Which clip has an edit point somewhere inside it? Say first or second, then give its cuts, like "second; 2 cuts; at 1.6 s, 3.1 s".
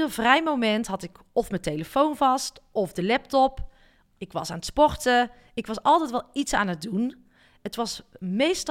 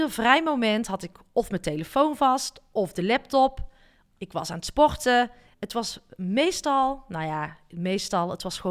second; 1 cut; at 5.5 s